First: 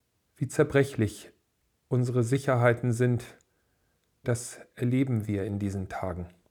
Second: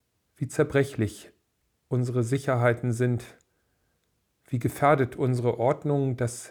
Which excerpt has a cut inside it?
first; 1 cut; at 4.2 s

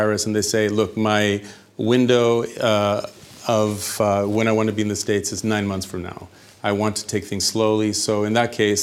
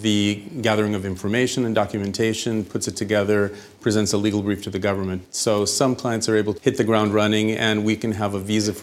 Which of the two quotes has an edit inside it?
second; 2 cuts; at 5.2 s, 6.6 s

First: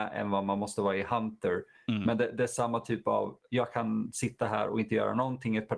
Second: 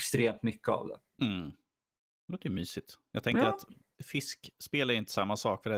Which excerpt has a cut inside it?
second; 1 cut; at 3.9 s

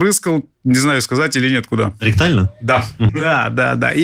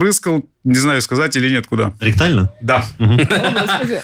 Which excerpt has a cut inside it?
first; 1 cut; at 3.1 s

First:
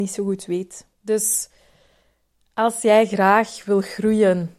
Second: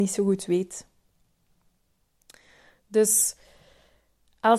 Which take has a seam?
first; 1 cut; at 0.9 s

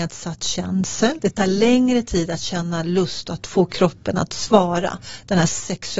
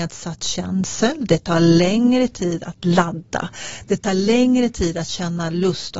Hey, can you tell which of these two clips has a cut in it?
first; 1 cut; at 1.2 s

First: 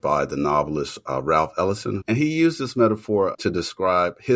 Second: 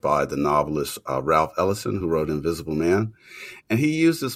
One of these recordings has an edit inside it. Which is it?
first; 2 cuts; at 2.0 s, 3.3 s

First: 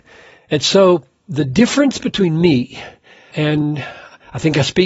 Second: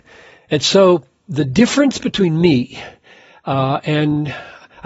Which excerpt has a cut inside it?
first; 1 cut; at 3.3 s

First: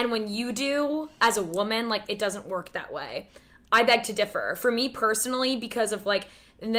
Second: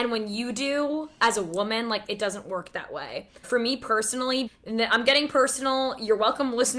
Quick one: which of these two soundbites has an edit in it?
second; 2 cuts; at 3.4 s, 4.5 s

